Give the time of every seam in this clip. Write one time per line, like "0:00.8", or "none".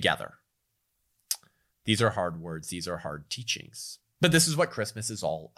none